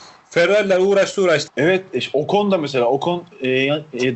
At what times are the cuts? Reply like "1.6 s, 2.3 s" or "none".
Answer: 1.5 s